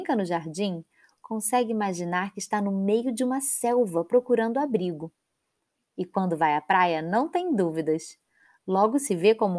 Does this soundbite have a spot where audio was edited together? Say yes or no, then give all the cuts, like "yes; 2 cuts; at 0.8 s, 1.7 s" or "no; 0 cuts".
no; 0 cuts